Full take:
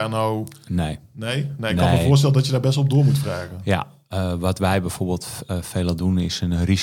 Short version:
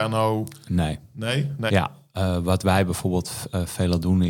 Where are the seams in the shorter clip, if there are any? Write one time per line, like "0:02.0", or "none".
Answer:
0:01.7